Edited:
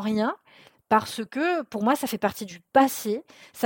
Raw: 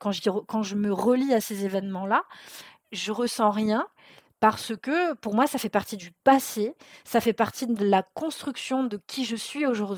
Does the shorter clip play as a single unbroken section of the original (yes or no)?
yes